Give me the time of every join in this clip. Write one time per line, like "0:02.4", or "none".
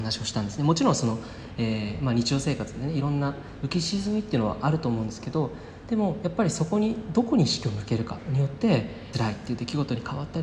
0:09.1

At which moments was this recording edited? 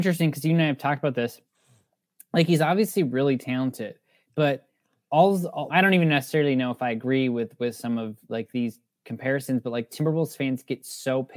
0:05.7

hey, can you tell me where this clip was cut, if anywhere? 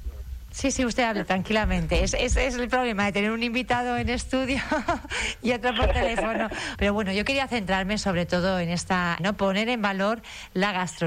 0:06.7
0:09.2

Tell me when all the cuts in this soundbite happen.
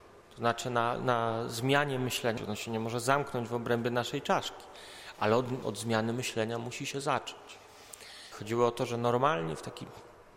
0:02.4
0:05.6
0:08.3

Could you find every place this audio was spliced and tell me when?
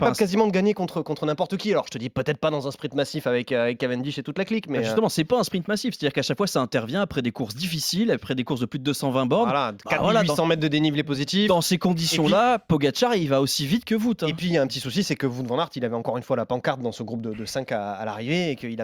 none

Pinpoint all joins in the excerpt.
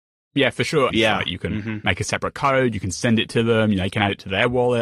0:00.9

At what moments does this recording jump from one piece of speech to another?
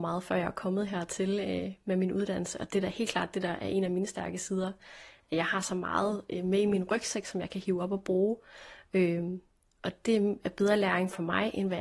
none

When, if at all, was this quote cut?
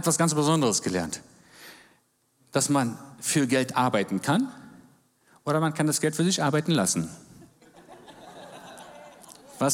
none

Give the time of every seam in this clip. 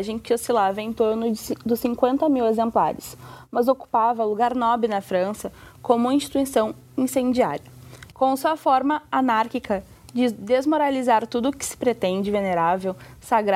0:08.1

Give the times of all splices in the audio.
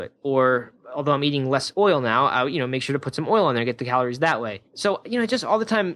none

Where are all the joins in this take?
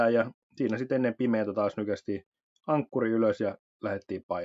none

